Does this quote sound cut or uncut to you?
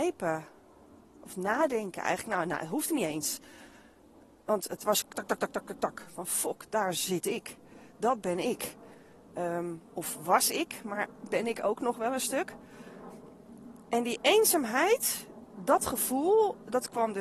cut